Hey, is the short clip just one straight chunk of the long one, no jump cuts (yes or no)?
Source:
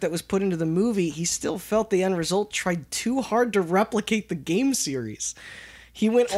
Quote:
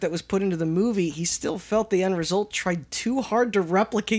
yes